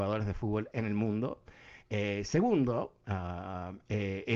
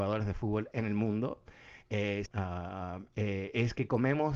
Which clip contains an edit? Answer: second; 1 cut; at 2.3 s

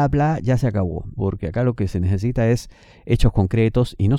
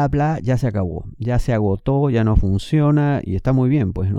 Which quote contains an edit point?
first; 1 cut; at 1.2 s

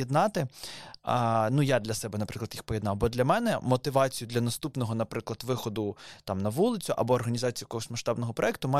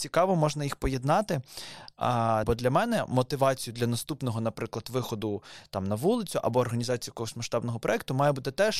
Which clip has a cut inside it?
second; 1 cut; at 2.4 s

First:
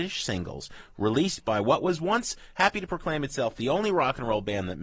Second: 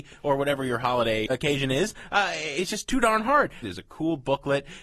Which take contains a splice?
second; 2 cuts; at 1.3 s, 3.6 s

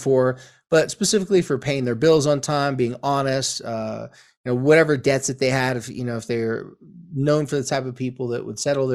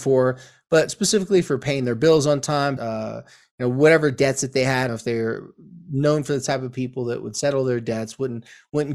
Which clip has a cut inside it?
second; 2 cuts; at 2.8 s, 4.9 s

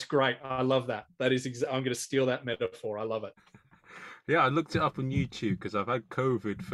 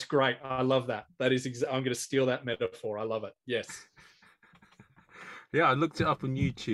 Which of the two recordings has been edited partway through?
first; 1 cut; at 3.4 s

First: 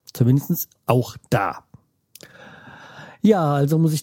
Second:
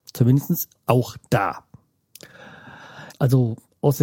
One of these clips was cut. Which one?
second; 1 cut; at 3.1 s

